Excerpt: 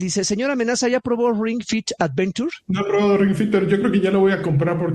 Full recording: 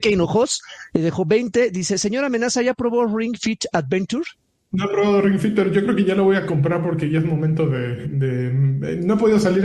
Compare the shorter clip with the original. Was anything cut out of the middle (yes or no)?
yes